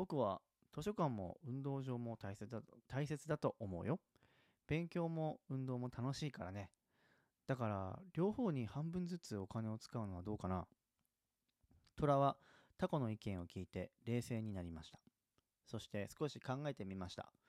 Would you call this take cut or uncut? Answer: uncut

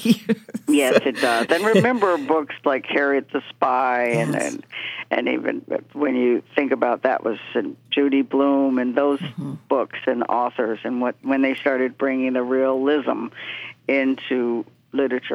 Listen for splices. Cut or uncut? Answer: uncut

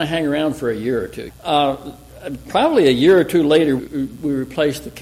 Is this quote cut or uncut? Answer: cut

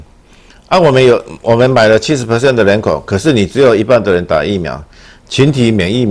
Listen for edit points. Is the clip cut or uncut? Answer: uncut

